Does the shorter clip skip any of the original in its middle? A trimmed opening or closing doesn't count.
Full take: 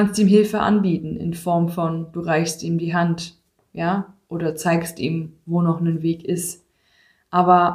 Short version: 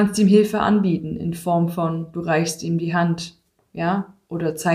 no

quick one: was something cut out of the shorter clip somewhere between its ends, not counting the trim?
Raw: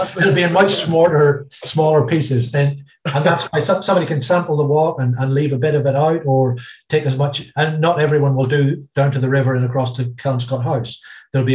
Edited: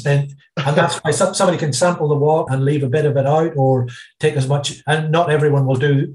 yes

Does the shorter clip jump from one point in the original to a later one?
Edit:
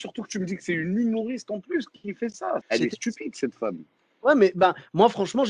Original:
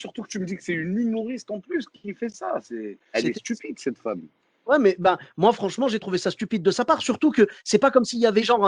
yes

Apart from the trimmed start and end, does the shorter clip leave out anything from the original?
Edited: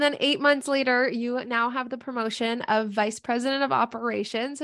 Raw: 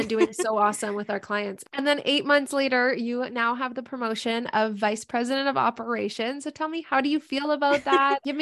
no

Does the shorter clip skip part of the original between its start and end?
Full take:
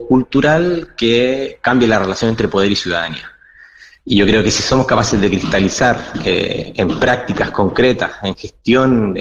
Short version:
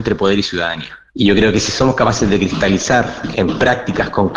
yes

